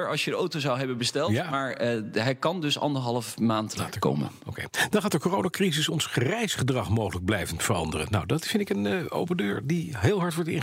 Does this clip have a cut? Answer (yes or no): yes